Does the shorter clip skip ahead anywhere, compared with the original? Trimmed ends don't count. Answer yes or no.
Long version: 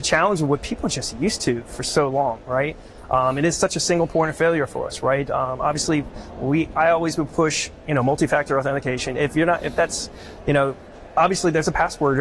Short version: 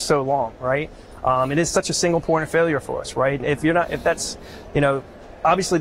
yes